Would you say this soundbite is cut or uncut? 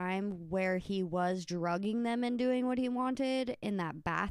cut